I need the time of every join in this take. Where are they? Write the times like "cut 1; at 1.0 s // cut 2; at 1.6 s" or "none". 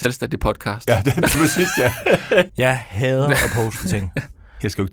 cut 1; at 1.3 s // cut 2; at 2.5 s

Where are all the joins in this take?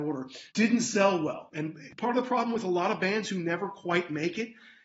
cut 1; at 1.5 s

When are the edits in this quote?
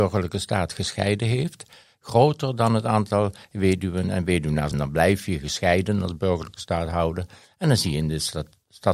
cut 1; at 4.7 s

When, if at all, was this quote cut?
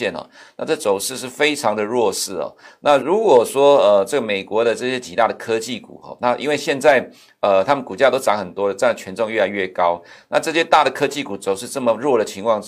cut 1; at 3.0 s

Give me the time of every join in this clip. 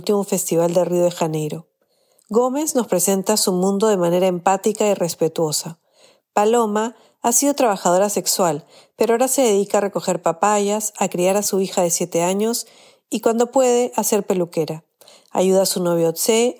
cut 1; at 2.2 s

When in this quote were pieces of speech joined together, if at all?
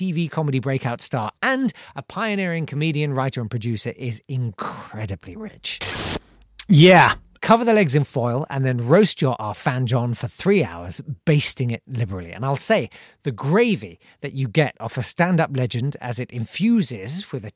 cut 1; at 7.4 s

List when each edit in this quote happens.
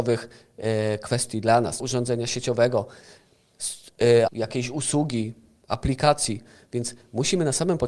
cut 1; at 1.8 s // cut 2; at 4.3 s

